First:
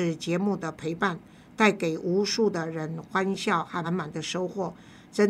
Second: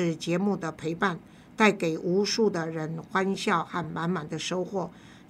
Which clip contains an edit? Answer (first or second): first